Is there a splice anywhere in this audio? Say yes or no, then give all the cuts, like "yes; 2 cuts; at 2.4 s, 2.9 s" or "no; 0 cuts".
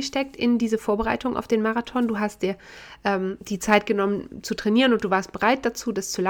no; 0 cuts